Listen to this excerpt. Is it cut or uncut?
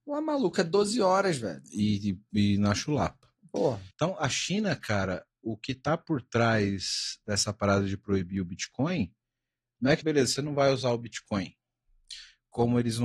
cut